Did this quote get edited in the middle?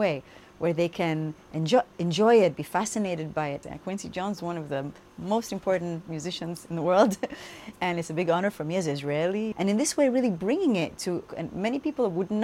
yes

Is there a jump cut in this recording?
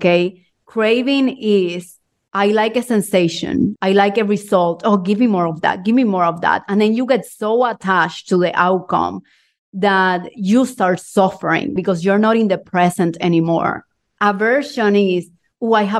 yes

